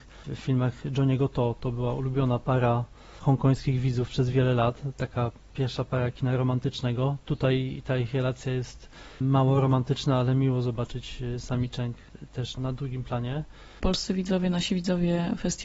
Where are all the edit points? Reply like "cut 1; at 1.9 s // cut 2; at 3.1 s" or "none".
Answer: cut 1; at 12.6 s

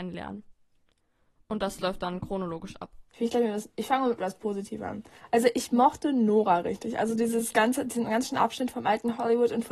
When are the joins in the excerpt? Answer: cut 1; at 3.1 s

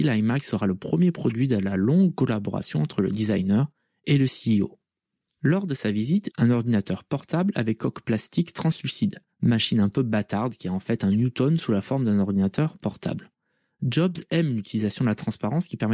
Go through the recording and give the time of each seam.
cut 1; at 6.3 s // cut 2; at 9.3 s

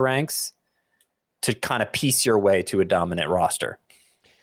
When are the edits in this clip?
cut 1; at 1.3 s

